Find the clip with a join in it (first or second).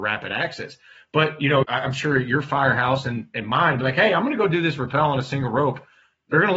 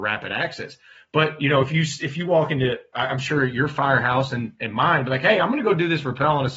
first